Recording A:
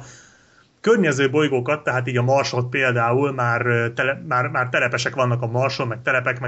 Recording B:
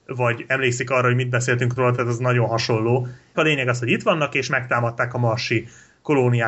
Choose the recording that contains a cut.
B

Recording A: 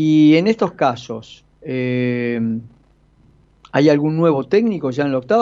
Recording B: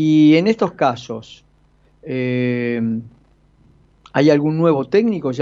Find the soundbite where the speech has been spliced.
A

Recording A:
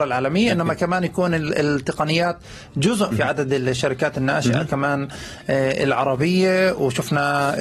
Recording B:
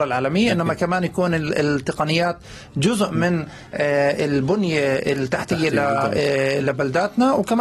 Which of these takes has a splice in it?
A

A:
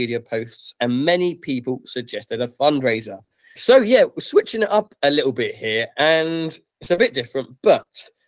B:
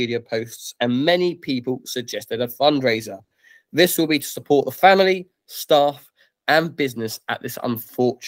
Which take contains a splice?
A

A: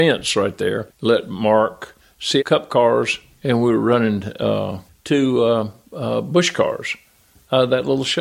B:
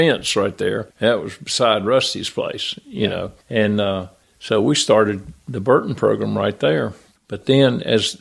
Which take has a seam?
A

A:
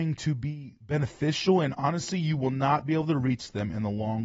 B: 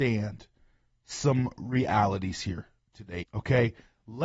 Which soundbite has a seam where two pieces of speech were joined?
B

